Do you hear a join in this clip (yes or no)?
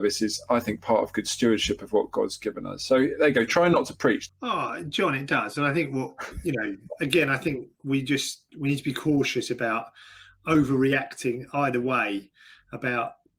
yes